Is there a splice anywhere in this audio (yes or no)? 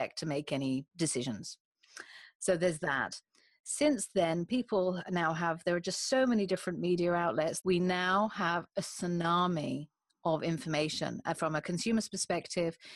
yes